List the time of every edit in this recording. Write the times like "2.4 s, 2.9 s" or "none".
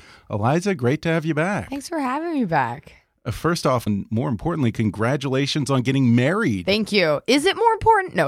3.9 s